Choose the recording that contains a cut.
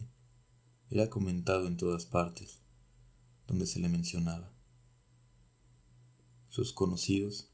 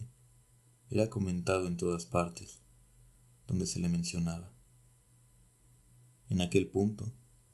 second; 1 cut; at 6.2 s

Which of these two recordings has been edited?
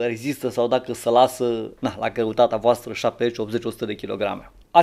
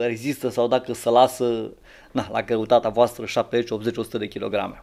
first; 1 cut; at 1.8 s

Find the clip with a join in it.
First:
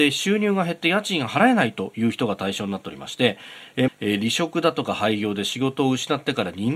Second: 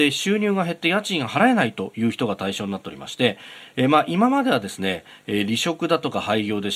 first; 1 cut; at 3.9 s

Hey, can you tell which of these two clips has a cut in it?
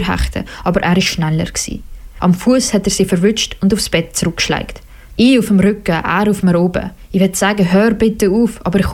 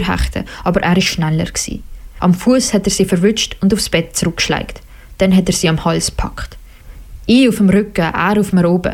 first; 1 cut; at 5.2 s

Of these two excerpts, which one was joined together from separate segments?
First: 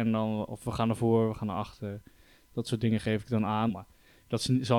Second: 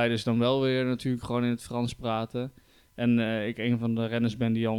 first; 1 cut; at 3.7 s

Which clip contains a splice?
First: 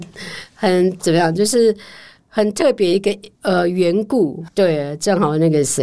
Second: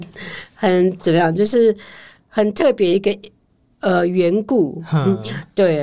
first; 2 cuts; at 3.3 s, 4.5 s

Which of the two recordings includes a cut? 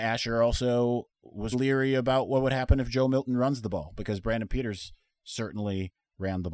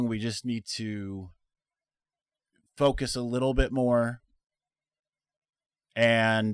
first; 1 cut; at 1.5 s

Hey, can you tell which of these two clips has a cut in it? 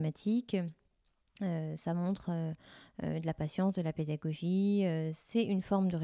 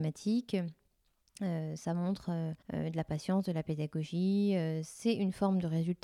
second; 1 cut; at 2.6 s

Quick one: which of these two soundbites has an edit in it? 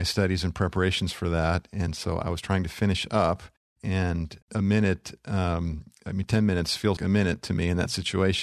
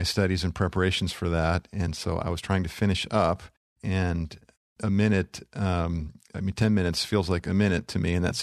first; 2 cuts; at 4.4 s, 7.0 s

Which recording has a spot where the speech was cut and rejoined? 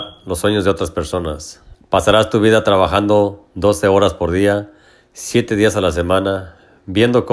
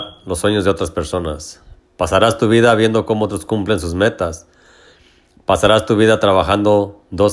first; 1 cut; at 1.7 s

